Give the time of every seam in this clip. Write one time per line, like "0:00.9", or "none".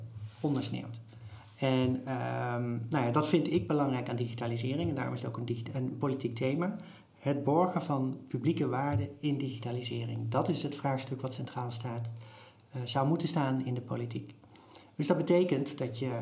none